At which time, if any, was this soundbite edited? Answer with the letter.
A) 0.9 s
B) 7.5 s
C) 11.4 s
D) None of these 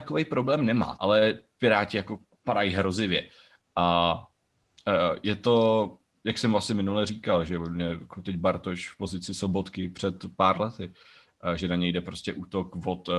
A